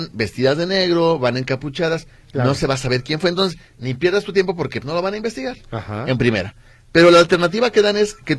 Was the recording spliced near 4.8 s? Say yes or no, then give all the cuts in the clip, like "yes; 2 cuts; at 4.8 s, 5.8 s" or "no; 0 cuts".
yes; 1 cut; at 4.8 s